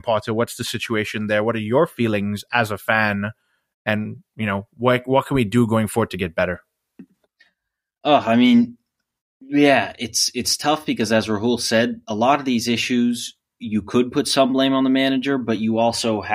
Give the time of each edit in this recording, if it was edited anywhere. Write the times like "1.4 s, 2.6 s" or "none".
none